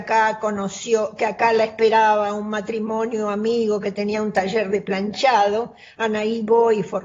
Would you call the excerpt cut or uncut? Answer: uncut